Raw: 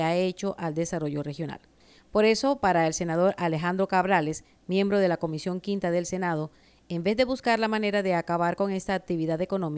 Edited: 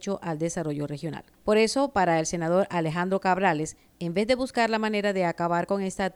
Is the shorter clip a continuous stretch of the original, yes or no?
no